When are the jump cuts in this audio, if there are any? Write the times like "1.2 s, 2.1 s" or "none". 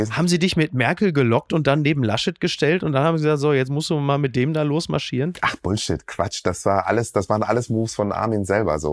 5.4 s